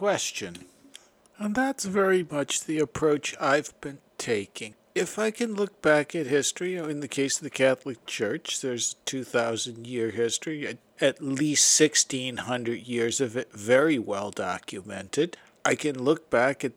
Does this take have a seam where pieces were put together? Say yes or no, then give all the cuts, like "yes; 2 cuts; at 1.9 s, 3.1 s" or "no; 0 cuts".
no; 0 cuts